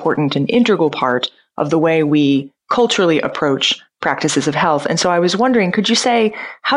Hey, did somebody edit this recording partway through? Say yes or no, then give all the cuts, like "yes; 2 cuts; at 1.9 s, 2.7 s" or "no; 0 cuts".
no; 0 cuts